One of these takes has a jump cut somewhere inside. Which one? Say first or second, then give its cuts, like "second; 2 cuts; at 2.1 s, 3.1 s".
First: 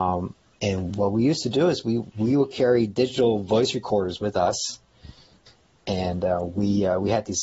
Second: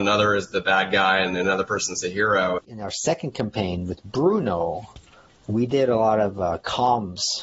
second; 1 cut; at 2.6 s